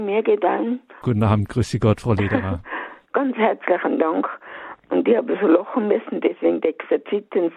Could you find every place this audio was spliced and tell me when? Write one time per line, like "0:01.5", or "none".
0:01.0
0:03.0